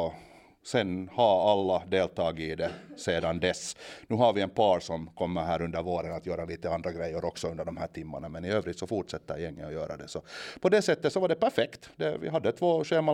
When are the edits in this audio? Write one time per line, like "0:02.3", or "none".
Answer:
none